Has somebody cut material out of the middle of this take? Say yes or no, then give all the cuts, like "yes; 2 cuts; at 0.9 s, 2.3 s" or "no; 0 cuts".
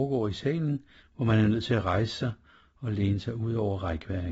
yes; 1 cut; at 1.0 s